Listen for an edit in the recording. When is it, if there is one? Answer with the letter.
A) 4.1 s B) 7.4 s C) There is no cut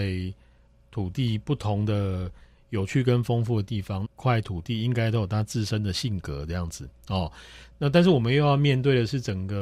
A